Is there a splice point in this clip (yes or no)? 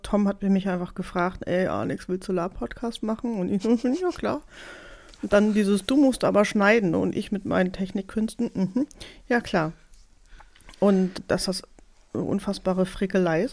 no